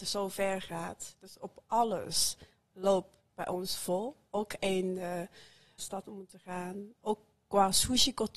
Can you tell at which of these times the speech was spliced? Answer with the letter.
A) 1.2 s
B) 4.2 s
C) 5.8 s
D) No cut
C